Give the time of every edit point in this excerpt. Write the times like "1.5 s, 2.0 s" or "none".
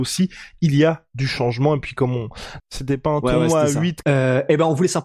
2.6 s, 4.0 s